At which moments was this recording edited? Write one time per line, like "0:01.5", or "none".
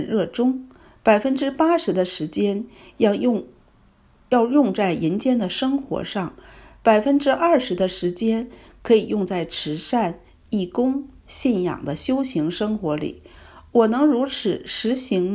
none